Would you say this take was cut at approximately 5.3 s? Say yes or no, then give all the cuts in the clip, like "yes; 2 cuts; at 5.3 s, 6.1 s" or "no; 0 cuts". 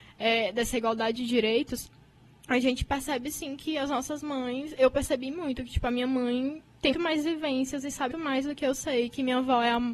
no; 2 cuts; at 6.9 s, 8.1 s